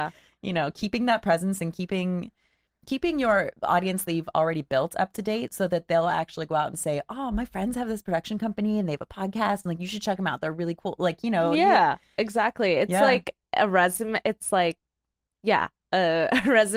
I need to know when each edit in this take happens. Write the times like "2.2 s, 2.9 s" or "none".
none